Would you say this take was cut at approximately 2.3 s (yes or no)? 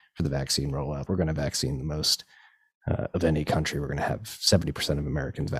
no